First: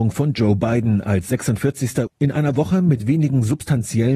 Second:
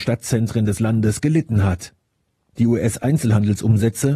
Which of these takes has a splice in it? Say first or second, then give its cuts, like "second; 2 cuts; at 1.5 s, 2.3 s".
first; 1 cut; at 2.1 s